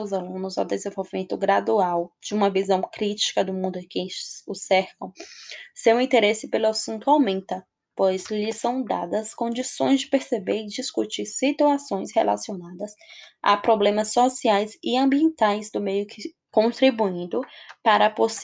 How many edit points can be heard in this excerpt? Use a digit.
1